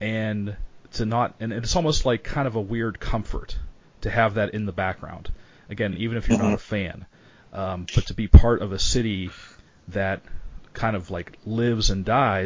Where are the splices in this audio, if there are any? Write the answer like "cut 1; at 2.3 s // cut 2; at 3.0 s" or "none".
none